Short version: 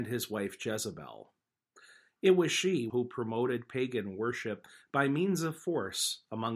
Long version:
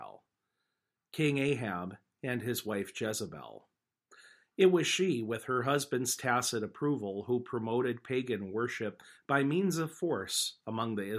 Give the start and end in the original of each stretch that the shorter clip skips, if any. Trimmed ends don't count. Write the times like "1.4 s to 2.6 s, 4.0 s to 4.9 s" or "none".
5.2 s to 7.2 s